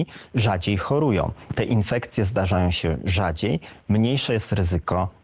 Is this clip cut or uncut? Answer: uncut